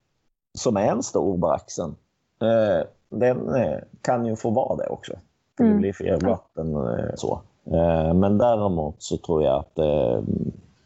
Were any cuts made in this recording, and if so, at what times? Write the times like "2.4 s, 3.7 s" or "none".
3.1 s, 7.2 s